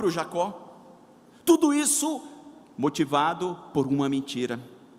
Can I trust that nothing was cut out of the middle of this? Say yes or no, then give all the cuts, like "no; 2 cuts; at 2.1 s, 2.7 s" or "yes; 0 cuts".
yes; 0 cuts